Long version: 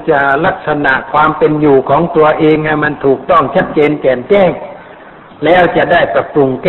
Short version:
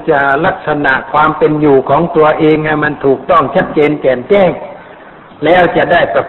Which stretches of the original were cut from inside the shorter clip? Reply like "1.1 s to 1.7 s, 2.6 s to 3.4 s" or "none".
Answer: none